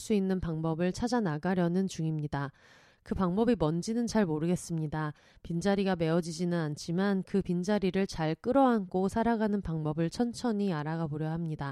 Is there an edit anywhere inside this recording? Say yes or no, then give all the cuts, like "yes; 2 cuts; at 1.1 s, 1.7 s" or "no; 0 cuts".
no; 0 cuts